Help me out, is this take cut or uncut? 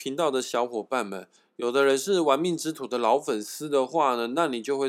uncut